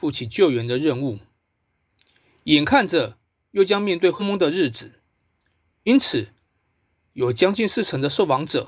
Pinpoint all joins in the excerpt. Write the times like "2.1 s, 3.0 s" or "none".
4.2 s